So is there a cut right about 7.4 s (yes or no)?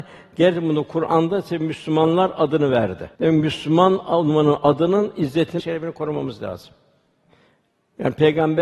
no